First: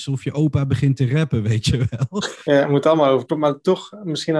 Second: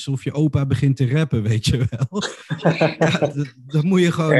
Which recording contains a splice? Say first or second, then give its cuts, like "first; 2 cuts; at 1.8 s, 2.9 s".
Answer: first; 1 cut; at 2.5 s